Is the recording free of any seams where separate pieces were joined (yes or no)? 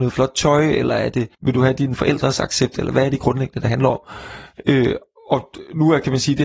no